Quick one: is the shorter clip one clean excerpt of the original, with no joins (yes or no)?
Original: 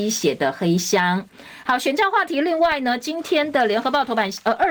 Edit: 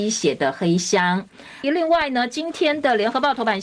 no